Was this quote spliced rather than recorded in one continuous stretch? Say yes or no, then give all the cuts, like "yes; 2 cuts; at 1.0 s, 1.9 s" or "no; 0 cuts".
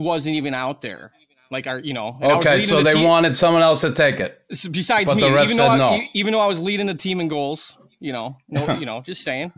no; 0 cuts